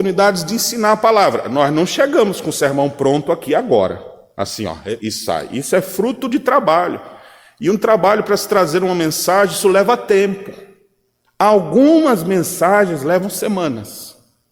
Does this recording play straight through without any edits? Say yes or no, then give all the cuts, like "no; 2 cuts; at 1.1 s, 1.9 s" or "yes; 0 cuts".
no; 1 cut; at 5.0 s